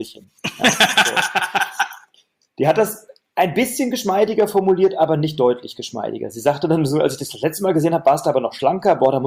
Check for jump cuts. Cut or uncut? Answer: uncut